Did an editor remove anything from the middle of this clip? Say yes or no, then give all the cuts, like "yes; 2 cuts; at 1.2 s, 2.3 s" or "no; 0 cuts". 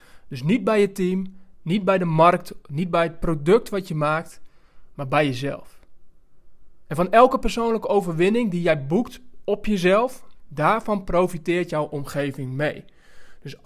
yes; 1 cut; at 10.4 s